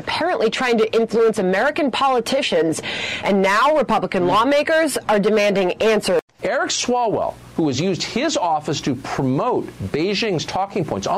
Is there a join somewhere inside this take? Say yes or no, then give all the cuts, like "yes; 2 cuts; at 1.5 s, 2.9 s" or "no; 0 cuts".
no; 0 cuts